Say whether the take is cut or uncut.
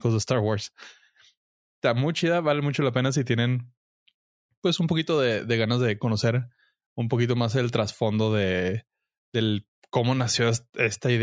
uncut